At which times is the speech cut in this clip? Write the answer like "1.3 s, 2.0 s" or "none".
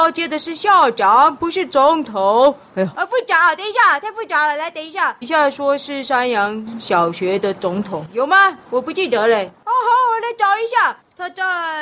2.9 s, 5.2 s